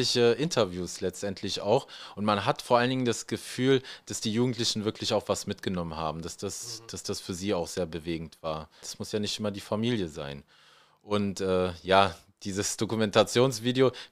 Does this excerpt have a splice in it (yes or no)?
yes